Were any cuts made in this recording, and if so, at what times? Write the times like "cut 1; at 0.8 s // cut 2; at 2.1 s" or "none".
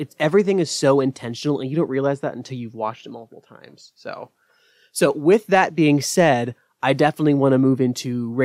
none